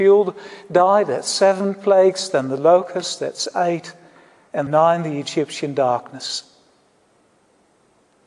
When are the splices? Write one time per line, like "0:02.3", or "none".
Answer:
0:04.7